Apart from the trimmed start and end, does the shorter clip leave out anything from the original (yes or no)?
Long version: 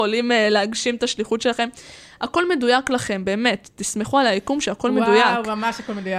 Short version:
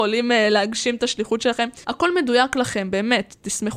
yes